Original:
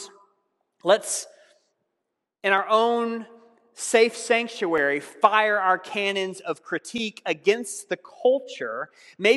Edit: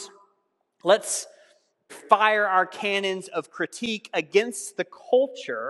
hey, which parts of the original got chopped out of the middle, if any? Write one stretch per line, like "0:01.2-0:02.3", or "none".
0:01.9-0:05.0